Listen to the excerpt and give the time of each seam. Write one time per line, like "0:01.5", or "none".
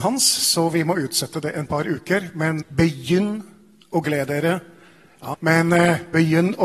0:02.6
0:05.3